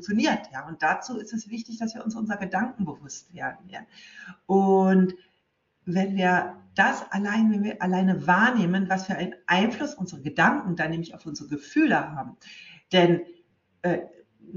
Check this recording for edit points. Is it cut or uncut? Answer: uncut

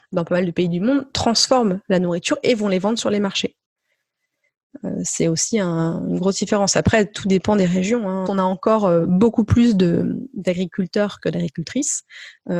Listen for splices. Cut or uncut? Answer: cut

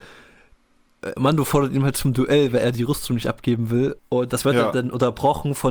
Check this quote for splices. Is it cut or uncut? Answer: cut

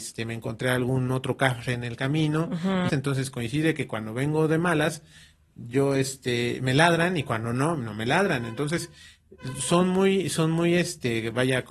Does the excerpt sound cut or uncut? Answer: cut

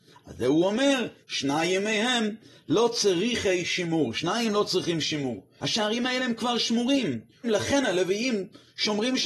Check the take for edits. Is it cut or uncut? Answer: cut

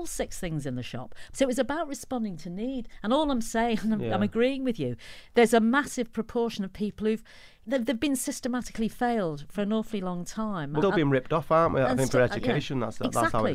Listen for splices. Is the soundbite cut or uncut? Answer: cut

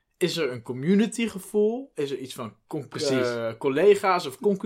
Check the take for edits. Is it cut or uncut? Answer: uncut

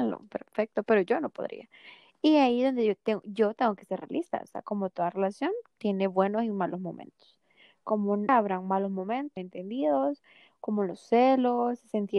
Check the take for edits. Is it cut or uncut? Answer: cut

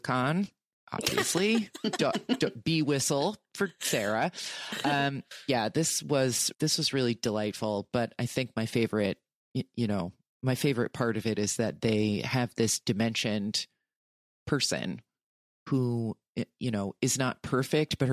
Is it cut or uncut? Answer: cut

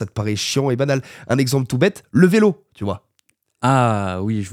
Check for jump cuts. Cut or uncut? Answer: uncut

